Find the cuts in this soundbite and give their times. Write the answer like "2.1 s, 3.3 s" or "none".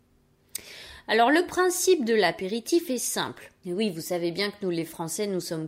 3.6 s